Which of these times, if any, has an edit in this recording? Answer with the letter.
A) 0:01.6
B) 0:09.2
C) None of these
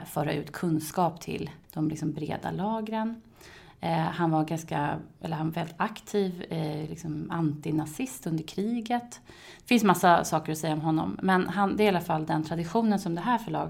A